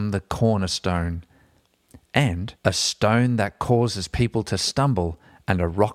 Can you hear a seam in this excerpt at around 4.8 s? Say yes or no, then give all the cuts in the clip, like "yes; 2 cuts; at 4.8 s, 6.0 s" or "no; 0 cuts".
no; 1 cut; at 2.6 s